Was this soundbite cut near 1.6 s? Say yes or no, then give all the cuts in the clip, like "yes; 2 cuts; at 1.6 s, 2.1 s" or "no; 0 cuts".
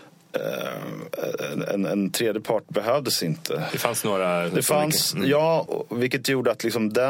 no; 2 cuts; at 3.7 s, 5.7 s